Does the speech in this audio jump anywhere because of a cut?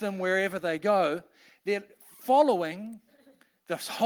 no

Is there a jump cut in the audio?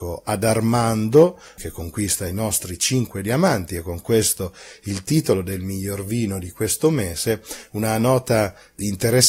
yes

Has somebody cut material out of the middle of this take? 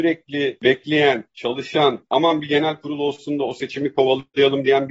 no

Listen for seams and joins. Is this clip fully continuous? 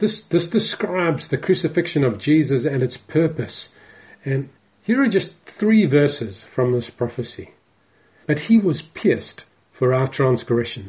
no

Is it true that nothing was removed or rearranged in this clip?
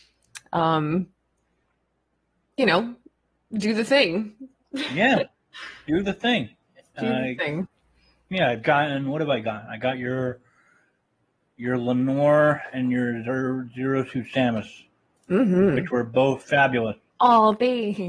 yes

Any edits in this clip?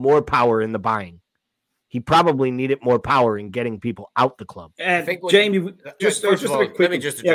yes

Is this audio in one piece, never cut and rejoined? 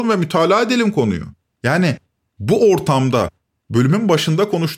no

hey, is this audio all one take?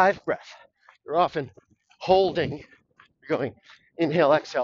yes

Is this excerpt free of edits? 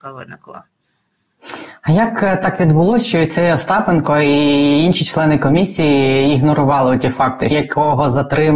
no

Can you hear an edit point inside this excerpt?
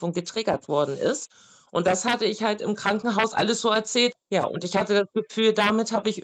yes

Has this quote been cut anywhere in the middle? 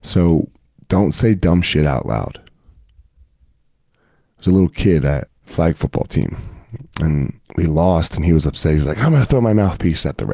yes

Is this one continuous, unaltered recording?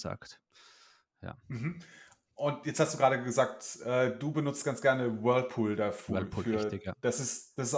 yes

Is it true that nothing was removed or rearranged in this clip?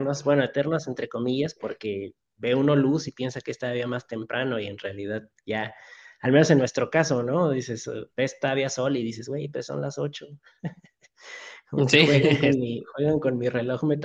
yes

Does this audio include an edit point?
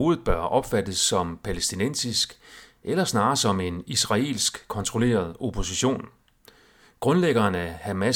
no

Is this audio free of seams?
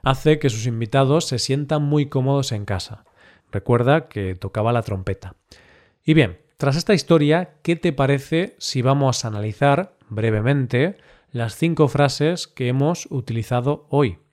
no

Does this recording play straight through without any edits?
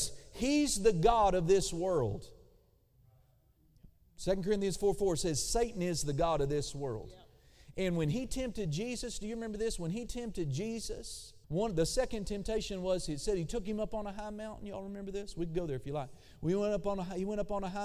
no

